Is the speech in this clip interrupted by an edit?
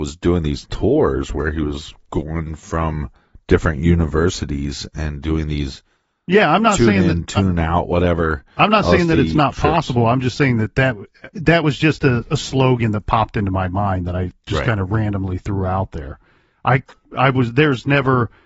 no; 0 cuts

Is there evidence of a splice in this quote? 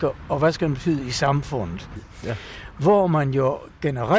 yes; 1 cut; at 2.0 s

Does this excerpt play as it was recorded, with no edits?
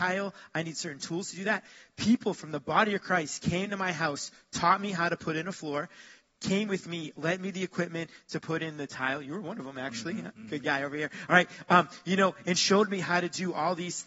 yes; 0 cuts

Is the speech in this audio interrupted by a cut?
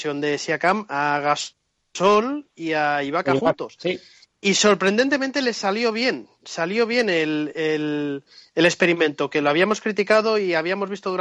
no; 0 cuts

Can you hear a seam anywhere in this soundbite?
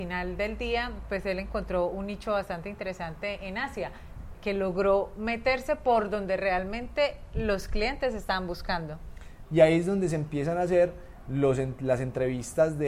yes; 2 cuts; at 4.3 s, 9.5 s

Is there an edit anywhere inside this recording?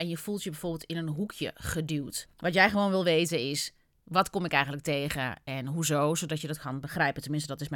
yes; 1 cut; at 2.3 s

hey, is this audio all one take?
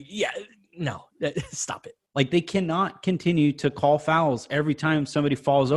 no; 1 cut; at 2.1 s

